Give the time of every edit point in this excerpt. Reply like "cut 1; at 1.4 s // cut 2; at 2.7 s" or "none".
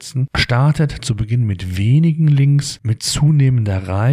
none